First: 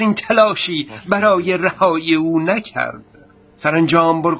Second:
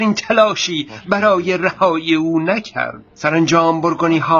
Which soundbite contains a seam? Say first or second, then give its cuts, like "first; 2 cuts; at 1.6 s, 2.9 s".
second; 1 cut; at 3.1 s